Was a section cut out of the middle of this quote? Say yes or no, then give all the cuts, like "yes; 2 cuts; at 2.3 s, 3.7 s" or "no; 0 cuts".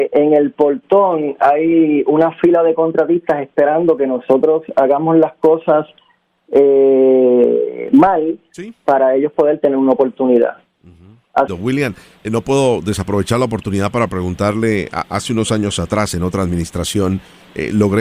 yes; 1 cut; at 11.5 s